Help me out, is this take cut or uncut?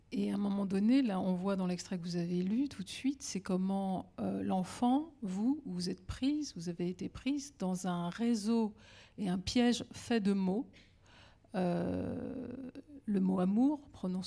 uncut